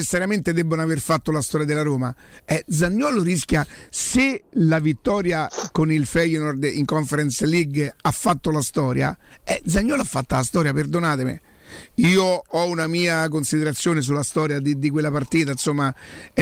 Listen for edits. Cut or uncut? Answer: uncut